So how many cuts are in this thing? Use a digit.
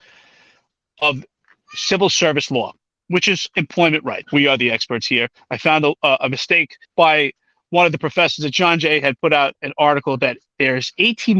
2